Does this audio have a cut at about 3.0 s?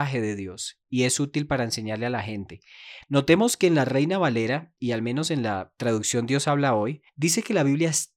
yes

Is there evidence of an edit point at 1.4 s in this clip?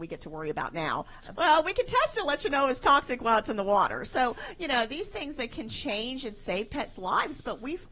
yes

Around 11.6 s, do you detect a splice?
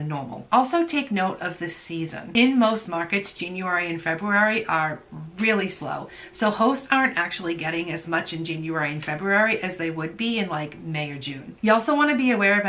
yes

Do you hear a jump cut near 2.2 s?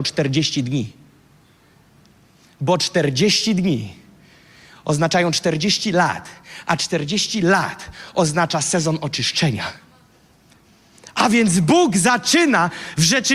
no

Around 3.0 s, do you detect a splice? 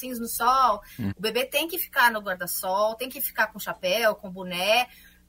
no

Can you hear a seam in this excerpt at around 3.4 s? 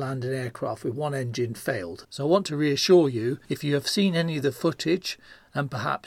yes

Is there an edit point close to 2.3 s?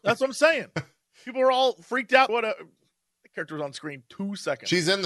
yes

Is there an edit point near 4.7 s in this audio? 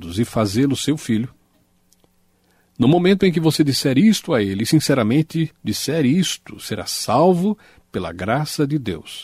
no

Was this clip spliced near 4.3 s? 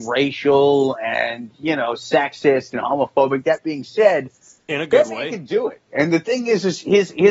no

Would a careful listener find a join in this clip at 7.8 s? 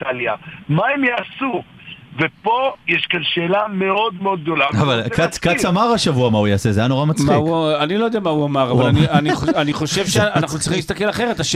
no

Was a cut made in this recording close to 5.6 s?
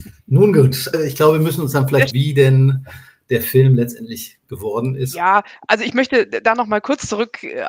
no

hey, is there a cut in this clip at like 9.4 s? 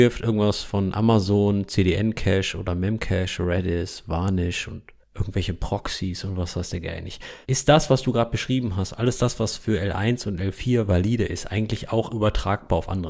no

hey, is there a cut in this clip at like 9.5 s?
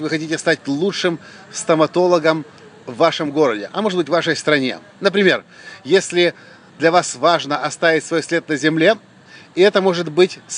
no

